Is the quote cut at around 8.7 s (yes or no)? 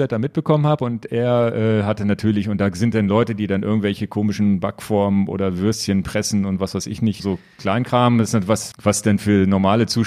yes